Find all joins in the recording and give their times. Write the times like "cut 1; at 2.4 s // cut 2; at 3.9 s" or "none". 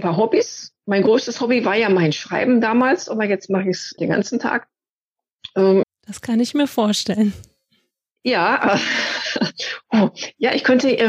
cut 1; at 4.0 s // cut 2; at 5.8 s

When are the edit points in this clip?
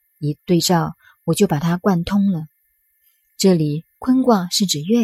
none

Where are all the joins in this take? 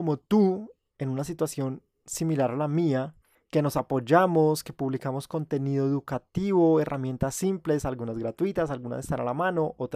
none

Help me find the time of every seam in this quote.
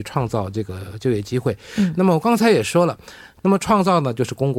cut 1; at 3.4 s

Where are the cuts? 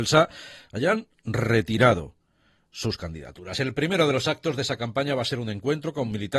none

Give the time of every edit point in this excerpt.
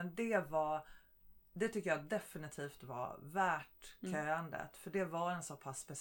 none

